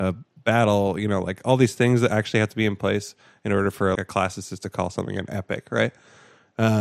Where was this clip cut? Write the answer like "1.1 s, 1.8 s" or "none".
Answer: 4.0 s